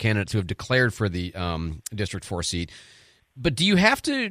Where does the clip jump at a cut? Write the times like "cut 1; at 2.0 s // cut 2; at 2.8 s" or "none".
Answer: cut 1; at 3.2 s